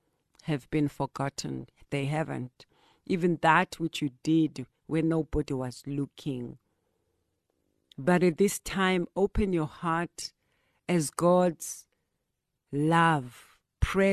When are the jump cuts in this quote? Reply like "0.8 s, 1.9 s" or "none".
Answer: none